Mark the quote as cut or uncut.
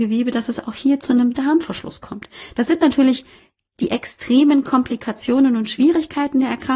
uncut